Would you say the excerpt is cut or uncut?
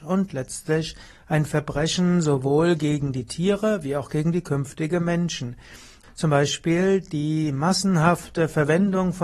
cut